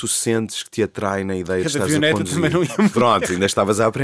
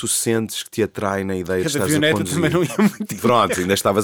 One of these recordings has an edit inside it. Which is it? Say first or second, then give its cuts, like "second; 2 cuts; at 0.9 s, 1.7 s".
first; 1 cut; at 2.9 s